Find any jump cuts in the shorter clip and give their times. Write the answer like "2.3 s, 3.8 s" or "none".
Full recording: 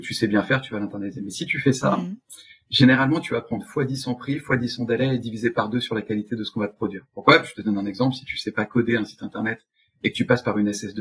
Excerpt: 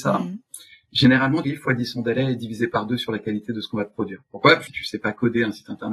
1.4 s, 4.7 s